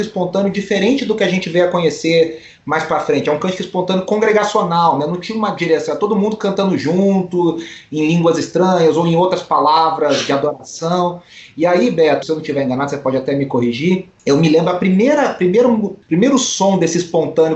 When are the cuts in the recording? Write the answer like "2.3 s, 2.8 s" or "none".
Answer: 12.2 s